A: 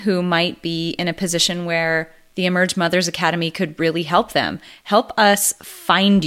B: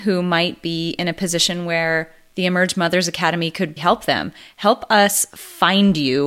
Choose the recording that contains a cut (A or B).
B